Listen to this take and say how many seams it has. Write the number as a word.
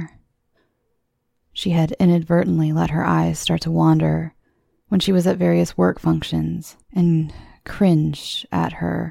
two